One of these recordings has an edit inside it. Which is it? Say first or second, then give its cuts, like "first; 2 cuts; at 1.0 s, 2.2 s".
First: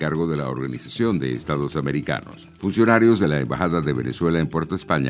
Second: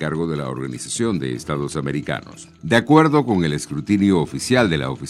first; 1 cut; at 2.6 s